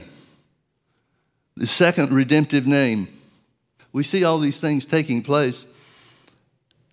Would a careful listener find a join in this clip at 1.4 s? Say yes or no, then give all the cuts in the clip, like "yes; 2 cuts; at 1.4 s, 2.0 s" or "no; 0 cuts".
no; 1 cut; at 3.8 s